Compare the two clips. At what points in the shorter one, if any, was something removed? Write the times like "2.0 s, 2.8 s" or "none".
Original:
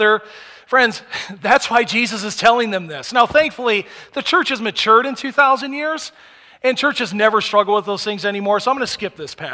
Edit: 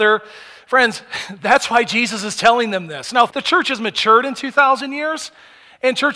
3.3 s